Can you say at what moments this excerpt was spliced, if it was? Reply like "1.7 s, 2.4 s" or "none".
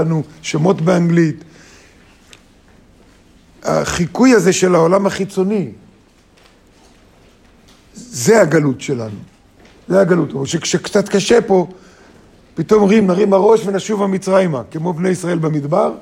none